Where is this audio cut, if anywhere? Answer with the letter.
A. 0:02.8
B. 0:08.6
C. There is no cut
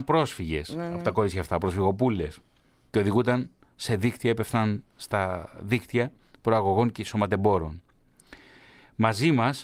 C